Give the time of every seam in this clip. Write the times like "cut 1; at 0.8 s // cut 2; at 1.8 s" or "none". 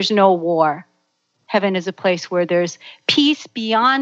cut 1; at 1.4 s